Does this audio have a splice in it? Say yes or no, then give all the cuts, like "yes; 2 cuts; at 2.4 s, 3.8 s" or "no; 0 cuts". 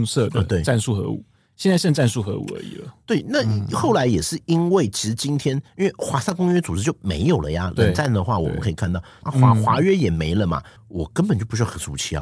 yes; 2 cuts; at 9.2 s, 10.8 s